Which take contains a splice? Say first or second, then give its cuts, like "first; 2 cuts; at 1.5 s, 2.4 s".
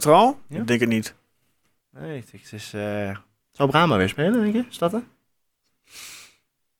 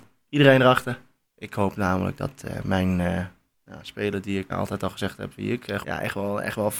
second; 2 cuts; at 4.5 s, 5.8 s